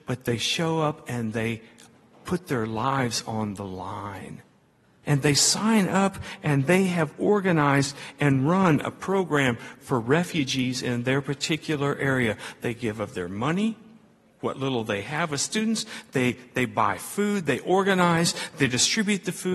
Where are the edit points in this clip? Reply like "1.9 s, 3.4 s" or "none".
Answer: 5.0 s

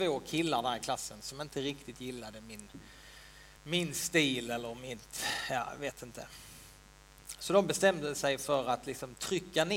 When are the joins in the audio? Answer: 3.6 s

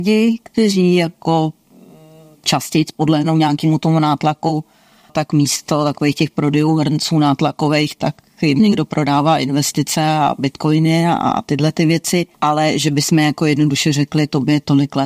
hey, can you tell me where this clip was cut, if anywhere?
5.1 s, 12.3 s

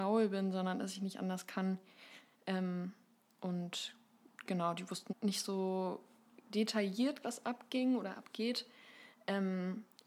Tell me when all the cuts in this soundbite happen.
5.1 s, 7.2 s

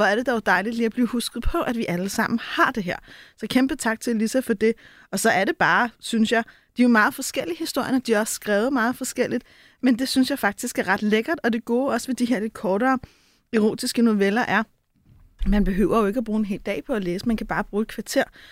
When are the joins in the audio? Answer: none

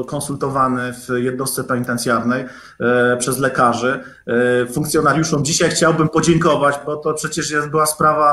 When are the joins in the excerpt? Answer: none

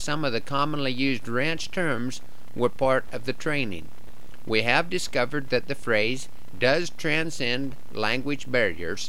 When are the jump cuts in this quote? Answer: 6.5 s

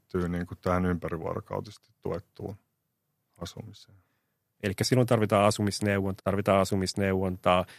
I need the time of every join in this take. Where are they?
4.6 s, 6.2 s

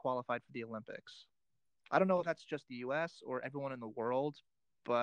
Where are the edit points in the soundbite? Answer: none

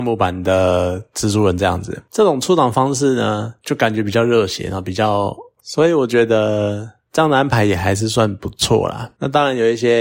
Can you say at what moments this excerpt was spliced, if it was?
5.6 s

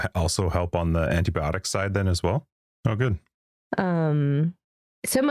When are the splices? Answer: 2.7 s

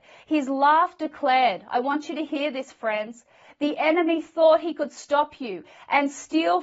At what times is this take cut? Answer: none

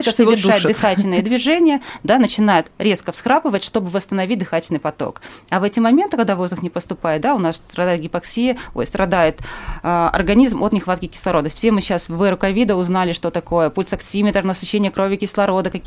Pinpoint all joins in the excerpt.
none

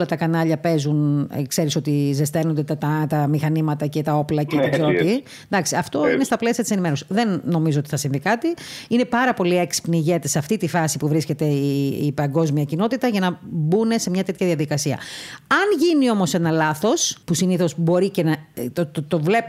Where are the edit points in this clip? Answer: 17.2 s

